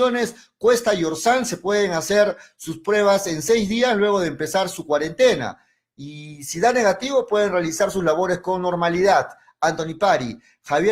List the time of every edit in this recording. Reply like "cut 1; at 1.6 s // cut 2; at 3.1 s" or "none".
none